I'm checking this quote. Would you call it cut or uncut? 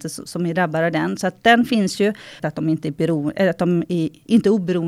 cut